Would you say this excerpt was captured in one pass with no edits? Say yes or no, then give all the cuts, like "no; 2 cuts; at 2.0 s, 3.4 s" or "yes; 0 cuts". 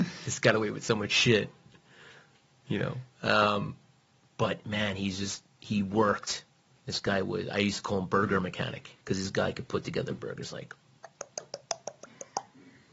no; 2 cuts; at 6.8 s, 9.0 s